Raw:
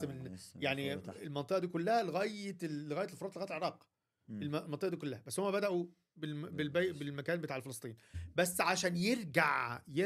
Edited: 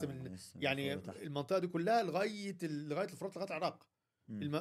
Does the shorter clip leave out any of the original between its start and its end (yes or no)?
no